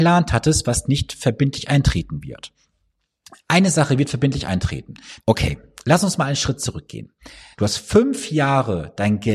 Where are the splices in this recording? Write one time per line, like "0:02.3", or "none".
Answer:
0:05.2
0:07.5